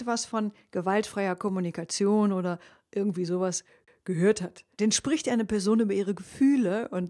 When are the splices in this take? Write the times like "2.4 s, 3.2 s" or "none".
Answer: 4.7 s